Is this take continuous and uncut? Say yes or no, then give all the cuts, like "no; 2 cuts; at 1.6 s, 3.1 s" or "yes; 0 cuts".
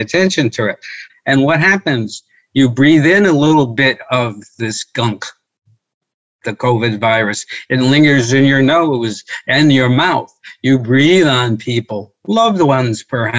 no; 1 cut; at 1.1 s